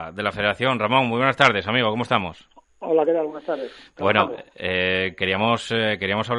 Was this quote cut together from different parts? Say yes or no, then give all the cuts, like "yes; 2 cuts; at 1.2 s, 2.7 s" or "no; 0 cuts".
no; 0 cuts